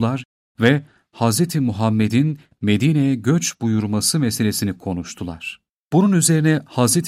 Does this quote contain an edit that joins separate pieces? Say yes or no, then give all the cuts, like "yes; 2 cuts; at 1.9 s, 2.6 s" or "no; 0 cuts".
yes; 1 cut; at 5.8 s